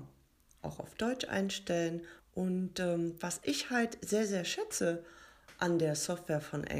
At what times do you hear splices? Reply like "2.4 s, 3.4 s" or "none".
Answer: 2.2 s